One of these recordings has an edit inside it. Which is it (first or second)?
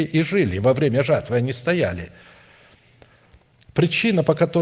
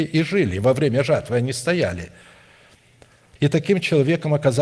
second